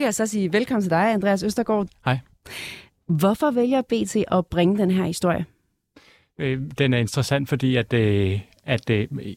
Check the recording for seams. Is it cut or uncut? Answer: cut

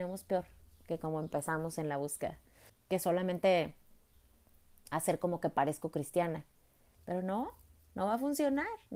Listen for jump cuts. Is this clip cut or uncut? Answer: cut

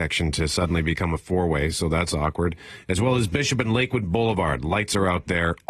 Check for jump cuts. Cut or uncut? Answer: uncut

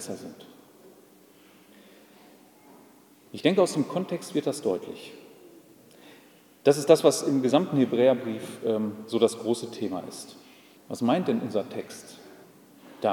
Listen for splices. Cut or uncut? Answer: cut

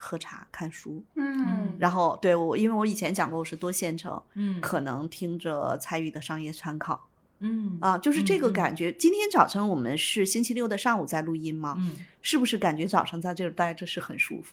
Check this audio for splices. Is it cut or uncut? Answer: uncut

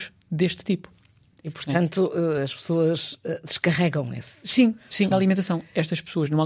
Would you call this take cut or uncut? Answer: cut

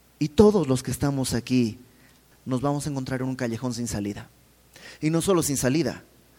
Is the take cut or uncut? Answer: cut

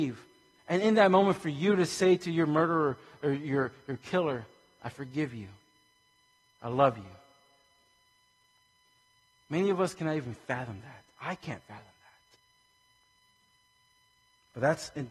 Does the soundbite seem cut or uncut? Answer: uncut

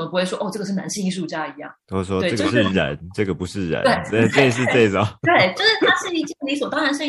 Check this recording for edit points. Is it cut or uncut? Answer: uncut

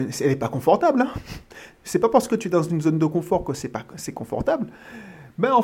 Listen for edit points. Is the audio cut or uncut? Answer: uncut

